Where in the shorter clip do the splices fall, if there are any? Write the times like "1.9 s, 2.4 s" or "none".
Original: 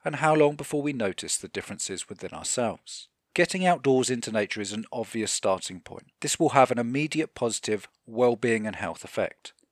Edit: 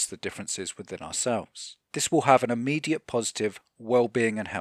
1.9 s

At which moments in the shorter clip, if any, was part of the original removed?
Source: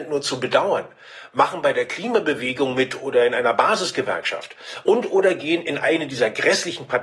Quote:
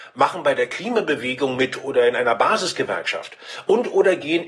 none

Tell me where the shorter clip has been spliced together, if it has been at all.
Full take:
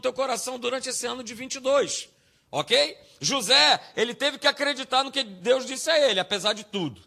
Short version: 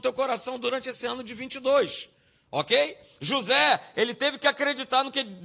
none

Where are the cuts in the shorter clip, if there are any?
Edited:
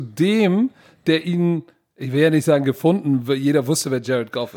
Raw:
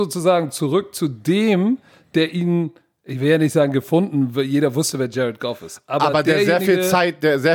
none

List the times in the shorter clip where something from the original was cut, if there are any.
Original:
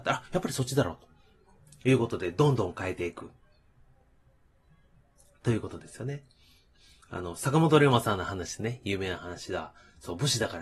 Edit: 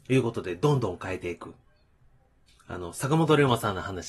2.5 s

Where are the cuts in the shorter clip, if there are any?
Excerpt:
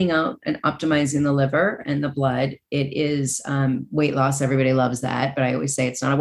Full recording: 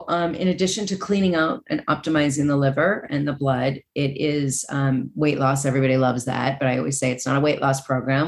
none

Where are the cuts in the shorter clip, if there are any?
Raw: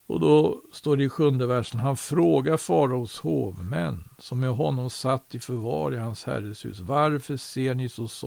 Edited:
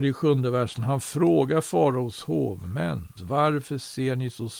3.2 s

